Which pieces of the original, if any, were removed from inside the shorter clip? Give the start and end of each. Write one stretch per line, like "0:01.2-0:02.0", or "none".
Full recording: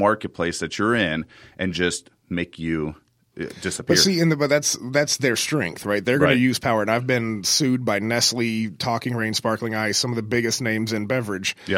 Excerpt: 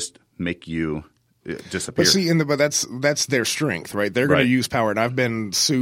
none